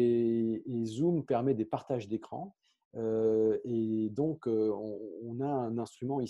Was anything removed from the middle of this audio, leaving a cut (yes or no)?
no